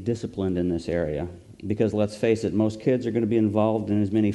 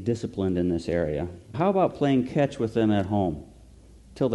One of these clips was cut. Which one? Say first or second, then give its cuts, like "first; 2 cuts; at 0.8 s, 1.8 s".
second; 1 cut; at 1.5 s